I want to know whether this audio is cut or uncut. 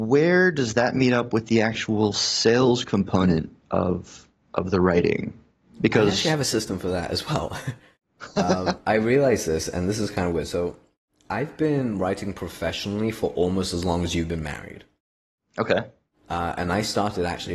uncut